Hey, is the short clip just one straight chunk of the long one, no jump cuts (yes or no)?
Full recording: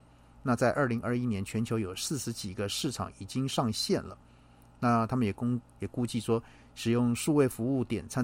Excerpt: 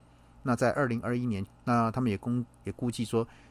no